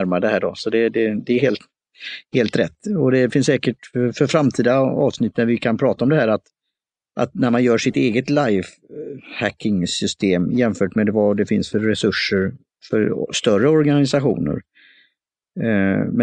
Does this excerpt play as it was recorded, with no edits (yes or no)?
yes